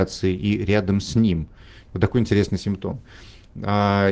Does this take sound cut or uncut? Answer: uncut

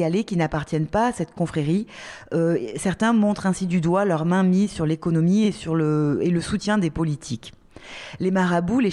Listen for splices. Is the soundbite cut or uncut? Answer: uncut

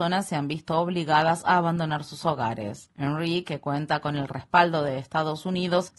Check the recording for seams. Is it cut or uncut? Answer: uncut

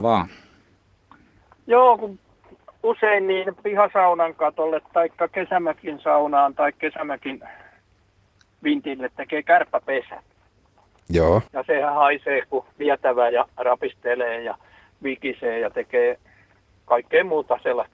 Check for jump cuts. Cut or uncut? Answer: cut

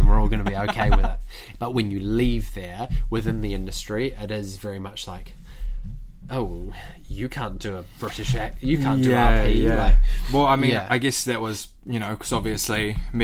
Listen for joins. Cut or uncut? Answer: cut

